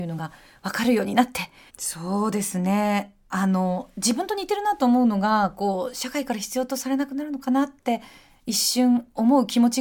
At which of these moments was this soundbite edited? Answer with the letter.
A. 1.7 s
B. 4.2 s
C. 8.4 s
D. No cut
A